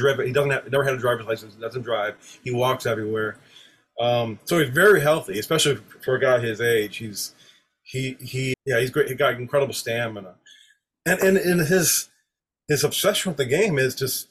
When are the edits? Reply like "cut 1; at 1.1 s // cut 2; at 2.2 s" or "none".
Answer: cut 1; at 8.5 s // cut 2; at 10.9 s